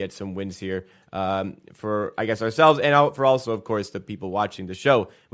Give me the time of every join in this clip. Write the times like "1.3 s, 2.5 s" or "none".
none